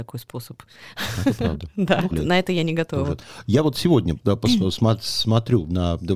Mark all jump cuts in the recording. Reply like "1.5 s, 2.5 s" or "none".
2.1 s